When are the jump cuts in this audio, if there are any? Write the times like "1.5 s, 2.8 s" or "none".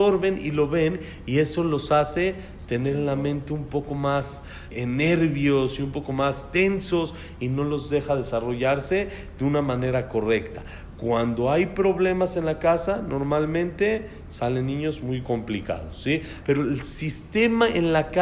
4.7 s, 16.4 s

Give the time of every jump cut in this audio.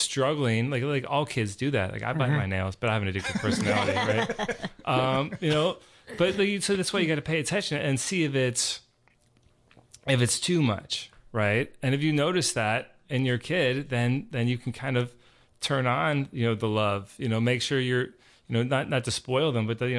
none

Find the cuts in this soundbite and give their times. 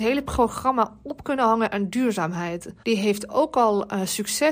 2.8 s

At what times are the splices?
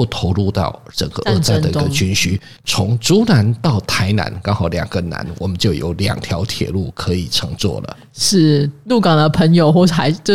2.6 s

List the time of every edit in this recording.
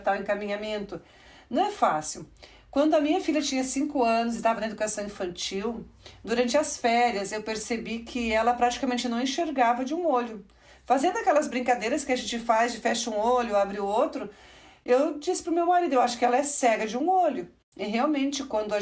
none

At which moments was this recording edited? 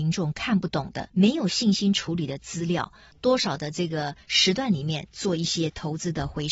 1.1 s, 3.1 s

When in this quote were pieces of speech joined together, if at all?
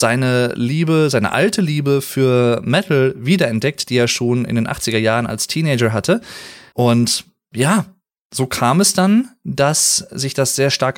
6.7 s

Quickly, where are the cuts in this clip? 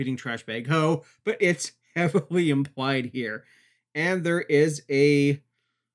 none

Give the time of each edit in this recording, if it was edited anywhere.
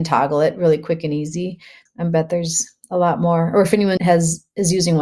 1.9 s, 4.0 s

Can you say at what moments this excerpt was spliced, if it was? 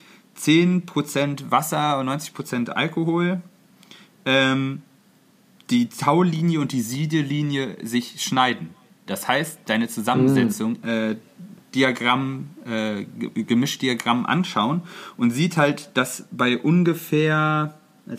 9.1 s, 10.8 s

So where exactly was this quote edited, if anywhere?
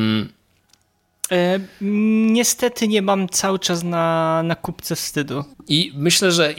1.3 s, 5.5 s

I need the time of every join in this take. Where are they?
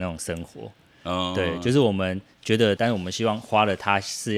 2.8 s

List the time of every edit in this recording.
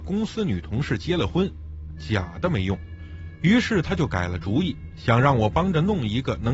2.0 s

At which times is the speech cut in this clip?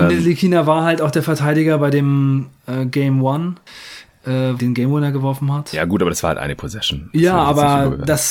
4.6 s

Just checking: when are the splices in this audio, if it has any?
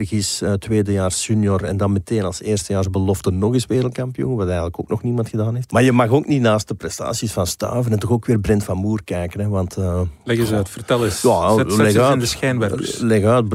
5.7 s

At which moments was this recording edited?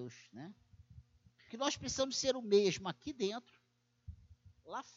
1.5 s

